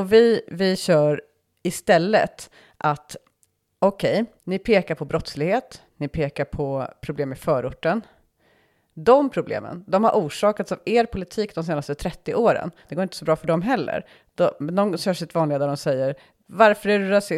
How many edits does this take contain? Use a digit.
2